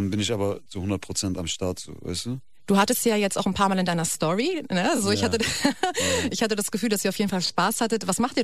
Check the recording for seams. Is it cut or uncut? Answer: uncut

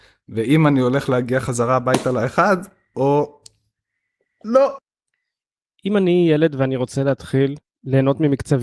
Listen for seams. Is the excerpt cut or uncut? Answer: uncut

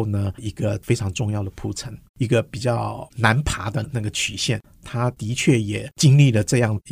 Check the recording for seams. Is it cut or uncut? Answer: cut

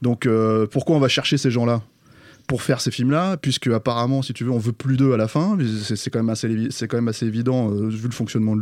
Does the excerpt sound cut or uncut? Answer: uncut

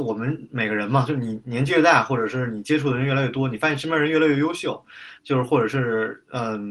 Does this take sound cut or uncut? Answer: cut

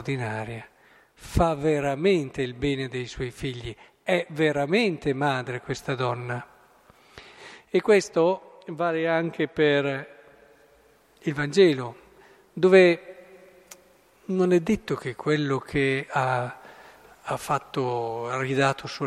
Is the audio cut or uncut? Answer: uncut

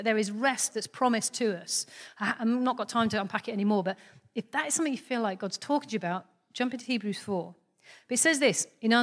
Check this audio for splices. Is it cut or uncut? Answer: uncut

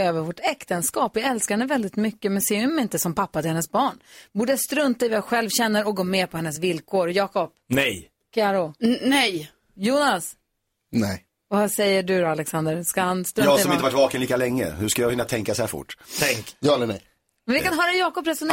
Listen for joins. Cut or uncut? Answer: uncut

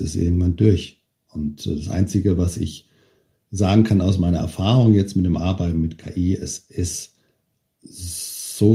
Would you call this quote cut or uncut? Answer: uncut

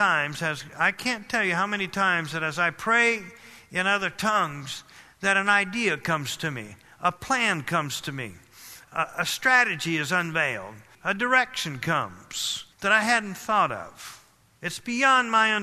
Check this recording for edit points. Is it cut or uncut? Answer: cut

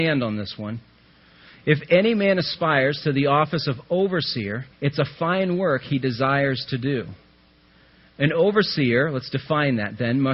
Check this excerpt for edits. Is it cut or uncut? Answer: cut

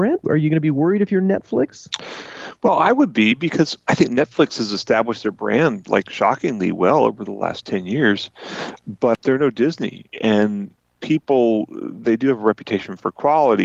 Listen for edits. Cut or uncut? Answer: uncut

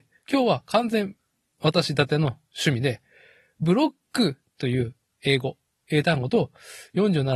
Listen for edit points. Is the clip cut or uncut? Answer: uncut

